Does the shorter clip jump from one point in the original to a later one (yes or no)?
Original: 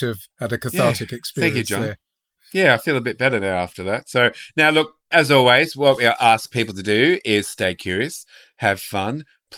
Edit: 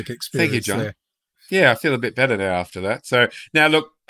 no